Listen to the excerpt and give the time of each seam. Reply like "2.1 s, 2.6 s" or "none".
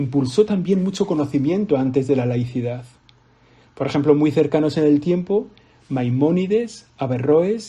none